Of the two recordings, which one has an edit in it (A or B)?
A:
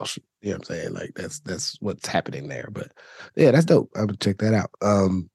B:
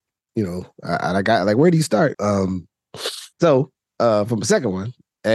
B